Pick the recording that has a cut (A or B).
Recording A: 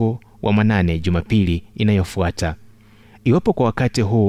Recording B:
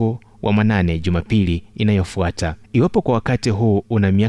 B